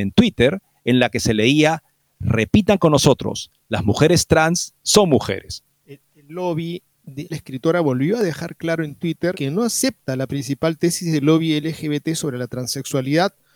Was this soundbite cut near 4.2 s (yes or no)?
no